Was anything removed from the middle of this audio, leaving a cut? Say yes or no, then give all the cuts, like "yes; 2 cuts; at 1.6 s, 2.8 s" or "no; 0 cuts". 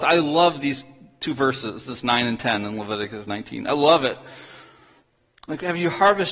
no; 0 cuts